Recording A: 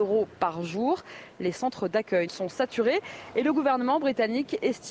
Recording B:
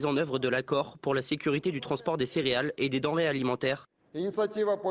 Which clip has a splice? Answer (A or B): A